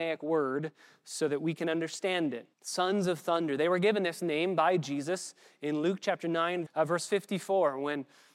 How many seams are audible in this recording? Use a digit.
2